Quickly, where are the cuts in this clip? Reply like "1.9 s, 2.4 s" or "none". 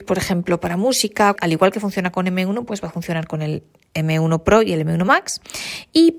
1.4 s